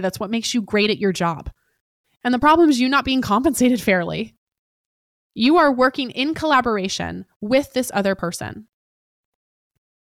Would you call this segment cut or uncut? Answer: cut